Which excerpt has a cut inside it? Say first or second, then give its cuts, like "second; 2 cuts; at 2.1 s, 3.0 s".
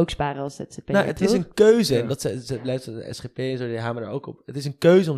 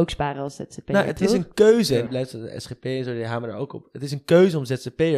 second; 1 cut; at 2.1 s